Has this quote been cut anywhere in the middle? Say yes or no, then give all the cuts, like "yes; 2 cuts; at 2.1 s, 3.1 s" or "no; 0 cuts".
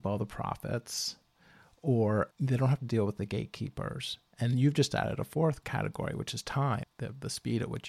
yes; 1 cut; at 6.8 s